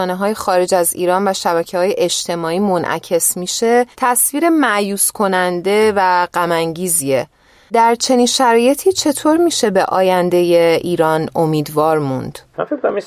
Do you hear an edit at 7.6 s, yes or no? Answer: no